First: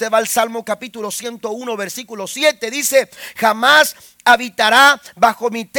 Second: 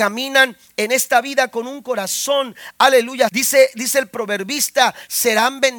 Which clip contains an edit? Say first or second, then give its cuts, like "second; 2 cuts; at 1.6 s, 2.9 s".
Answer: second; 1 cut; at 3.3 s